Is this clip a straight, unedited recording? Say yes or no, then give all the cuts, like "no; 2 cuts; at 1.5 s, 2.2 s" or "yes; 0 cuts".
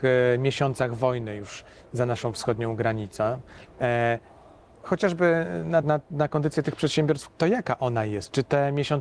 no; 2 cuts; at 5.8 s, 7.3 s